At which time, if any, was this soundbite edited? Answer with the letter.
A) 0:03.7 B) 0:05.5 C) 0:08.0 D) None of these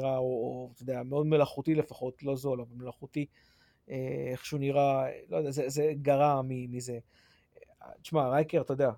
D